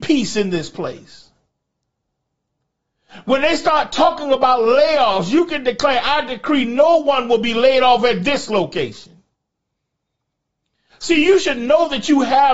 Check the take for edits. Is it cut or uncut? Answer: uncut